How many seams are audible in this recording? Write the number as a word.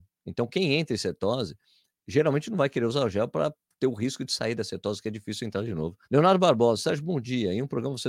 one